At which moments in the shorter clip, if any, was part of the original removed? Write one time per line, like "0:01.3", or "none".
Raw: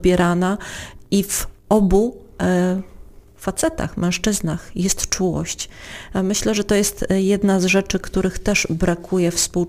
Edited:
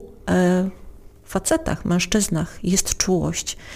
none